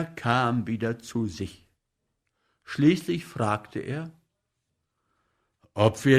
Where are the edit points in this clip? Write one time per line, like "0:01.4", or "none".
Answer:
none